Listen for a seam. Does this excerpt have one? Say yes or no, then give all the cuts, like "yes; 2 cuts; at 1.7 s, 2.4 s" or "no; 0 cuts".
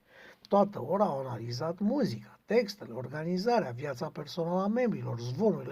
no; 0 cuts